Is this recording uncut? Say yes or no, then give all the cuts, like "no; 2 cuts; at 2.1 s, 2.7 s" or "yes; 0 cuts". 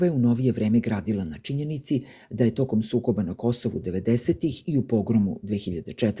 yes; 0 cuts